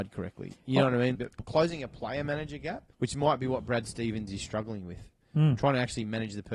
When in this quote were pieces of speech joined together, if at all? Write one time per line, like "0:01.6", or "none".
0:01.2
0:02.9